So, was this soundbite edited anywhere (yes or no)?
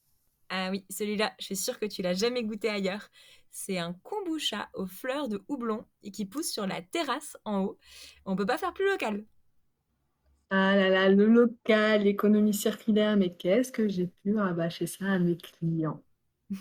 no